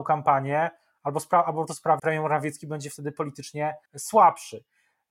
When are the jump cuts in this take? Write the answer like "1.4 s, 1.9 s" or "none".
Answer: 2.0 s, 3.9 s